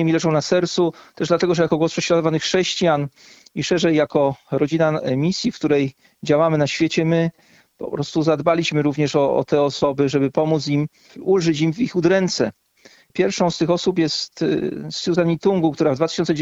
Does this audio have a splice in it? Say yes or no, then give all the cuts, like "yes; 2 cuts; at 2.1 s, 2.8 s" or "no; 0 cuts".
no; 0 cuts